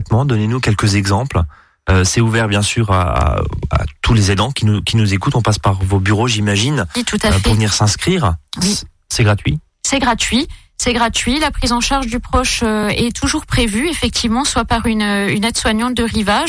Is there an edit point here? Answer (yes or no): no